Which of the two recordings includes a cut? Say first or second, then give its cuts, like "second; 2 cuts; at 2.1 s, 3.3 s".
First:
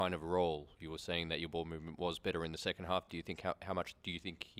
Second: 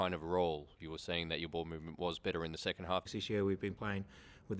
second; 1 cut; at 3.1 s